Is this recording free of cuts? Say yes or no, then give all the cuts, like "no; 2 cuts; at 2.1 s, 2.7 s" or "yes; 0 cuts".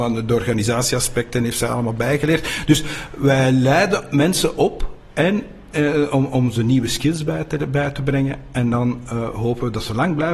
yes; 0 cuts